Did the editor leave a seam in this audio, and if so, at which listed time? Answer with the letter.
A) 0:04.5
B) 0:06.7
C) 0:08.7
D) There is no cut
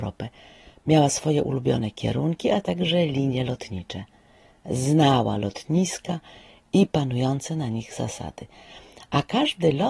D